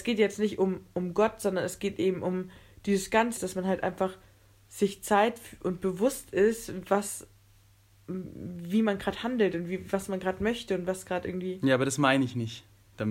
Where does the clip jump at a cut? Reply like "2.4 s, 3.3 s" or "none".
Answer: 3.4 s

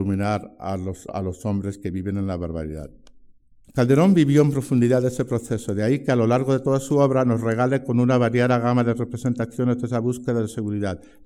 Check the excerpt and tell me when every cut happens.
1.1 s, 3.6 s

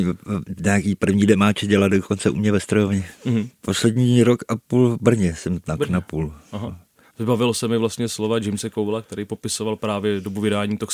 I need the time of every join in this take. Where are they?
3.6 s, 7.0 s

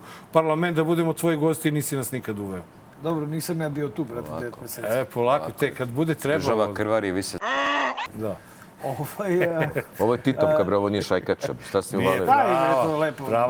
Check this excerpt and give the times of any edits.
none

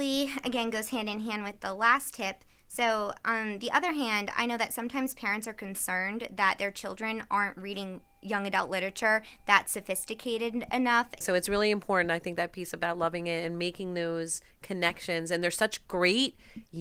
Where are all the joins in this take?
11.2 s

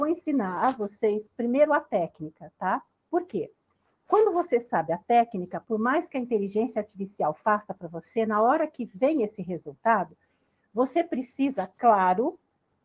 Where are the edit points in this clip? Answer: none

